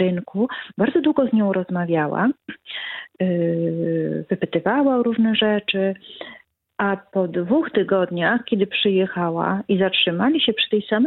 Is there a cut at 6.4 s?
no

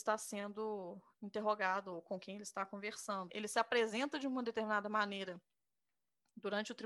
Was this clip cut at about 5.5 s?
no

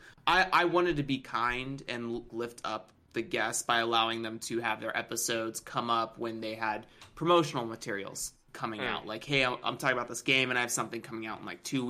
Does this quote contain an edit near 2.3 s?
yes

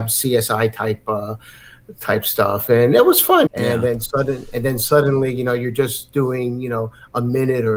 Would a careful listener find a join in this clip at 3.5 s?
yes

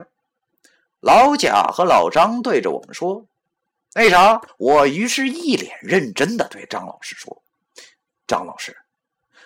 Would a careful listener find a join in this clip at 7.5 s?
yes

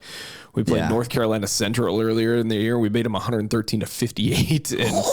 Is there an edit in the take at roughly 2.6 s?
no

